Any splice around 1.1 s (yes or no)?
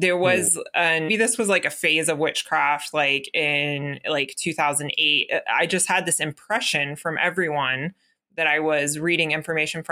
yes